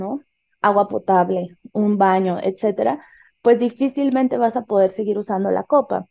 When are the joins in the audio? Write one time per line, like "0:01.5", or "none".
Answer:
none